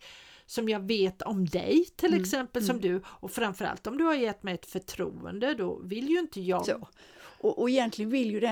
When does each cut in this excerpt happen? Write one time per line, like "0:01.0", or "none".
0:06.6